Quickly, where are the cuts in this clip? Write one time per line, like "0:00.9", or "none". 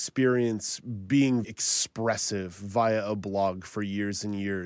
0:01.4